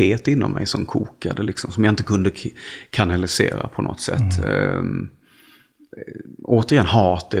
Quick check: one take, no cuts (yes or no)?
yes